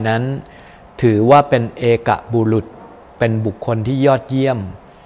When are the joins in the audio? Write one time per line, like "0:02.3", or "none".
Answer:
0:03.6